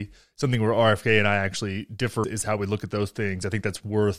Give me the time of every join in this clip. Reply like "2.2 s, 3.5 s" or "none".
2.2 s